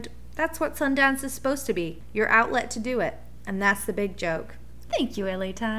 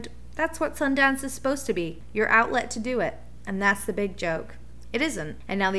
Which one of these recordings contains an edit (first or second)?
first